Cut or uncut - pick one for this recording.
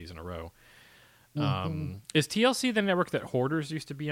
uncut